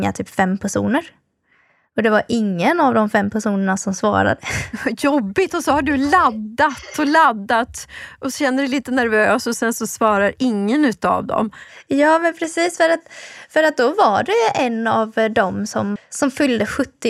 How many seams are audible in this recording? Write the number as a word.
one